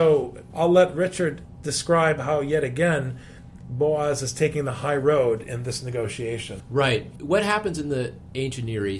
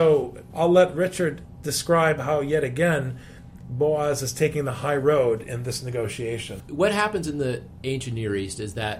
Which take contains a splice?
second; 1 cut; at 6.7 s

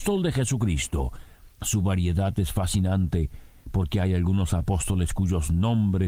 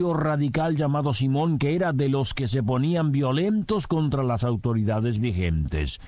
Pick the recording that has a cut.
first; 1 cut; at 1.5 s

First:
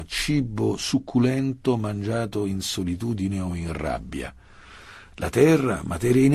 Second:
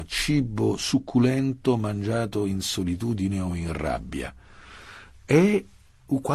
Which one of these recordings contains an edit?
first; 1 cut; at 5.1 s

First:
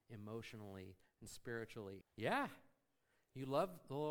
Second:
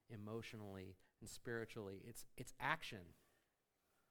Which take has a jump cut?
first; 1 cut; at 2.0 s

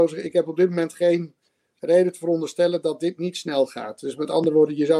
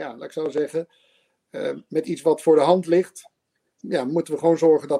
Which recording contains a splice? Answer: second; 1 cut; at 3.8 s

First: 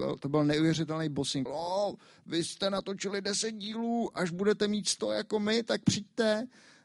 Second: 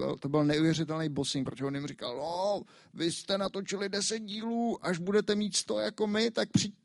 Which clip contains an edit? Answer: first; 1 cut; at 1.5 s

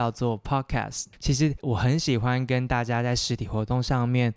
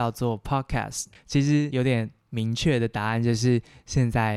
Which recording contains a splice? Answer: first; 1 cut; at 1.1 s

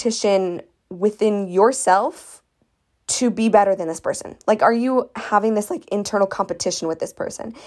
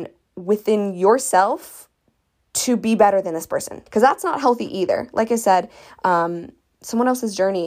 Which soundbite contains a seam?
second; 1 cut; at 3.9 s

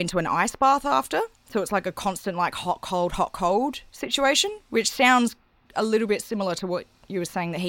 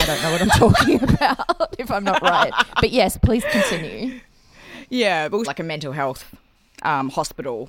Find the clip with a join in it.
second; 1 cut; at 5.4 s

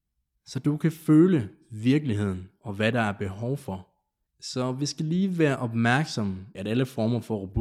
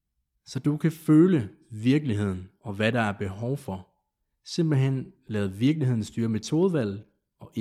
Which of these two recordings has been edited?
first; 2 cuts; at 4.3 s, 6.5 s

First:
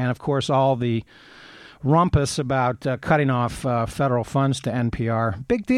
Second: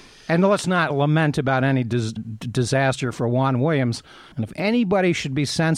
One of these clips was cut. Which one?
second; 2 cuts; at 2.2 s, 4.3 s

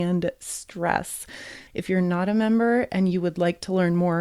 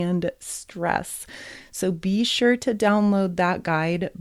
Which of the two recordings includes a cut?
first; 1 cut; at 1.7 s

